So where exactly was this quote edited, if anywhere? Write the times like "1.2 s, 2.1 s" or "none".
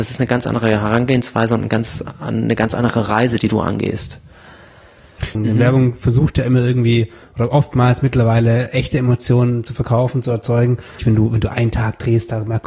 5.3 s, 11.0 s